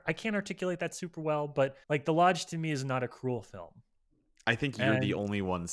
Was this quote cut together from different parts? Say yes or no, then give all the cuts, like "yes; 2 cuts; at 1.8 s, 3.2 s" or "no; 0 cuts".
yes; 1 cut; at 1.8 s